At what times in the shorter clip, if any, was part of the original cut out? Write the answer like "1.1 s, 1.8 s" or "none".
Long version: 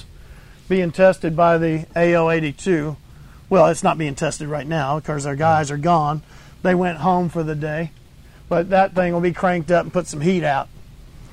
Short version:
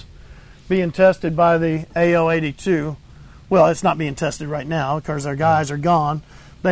none